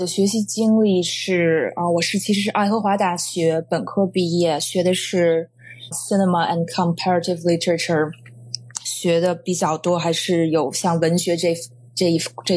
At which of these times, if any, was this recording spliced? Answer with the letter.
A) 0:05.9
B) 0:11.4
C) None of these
A